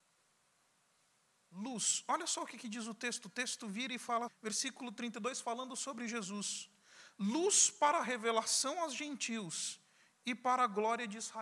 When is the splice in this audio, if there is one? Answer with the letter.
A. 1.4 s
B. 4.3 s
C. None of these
B